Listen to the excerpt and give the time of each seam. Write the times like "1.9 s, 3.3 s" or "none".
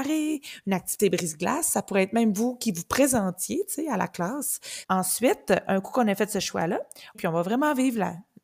4.8 s, 7.1 s